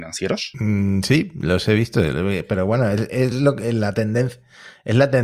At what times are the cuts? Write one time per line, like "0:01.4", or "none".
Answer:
none